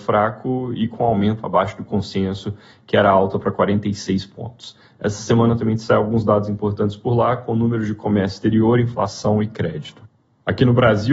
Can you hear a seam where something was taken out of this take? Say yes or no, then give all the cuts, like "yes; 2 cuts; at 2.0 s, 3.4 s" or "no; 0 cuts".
no; 0 cuts